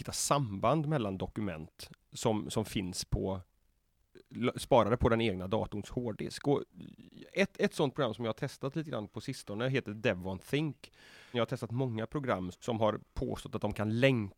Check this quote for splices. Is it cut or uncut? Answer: cut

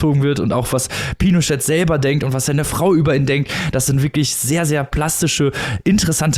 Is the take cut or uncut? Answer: uncut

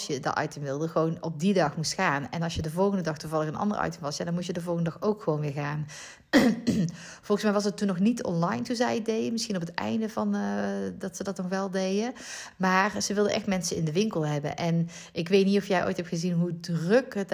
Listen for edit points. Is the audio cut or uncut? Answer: uncut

